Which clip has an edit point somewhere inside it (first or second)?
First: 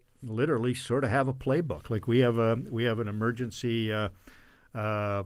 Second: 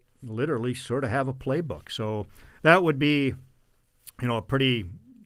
second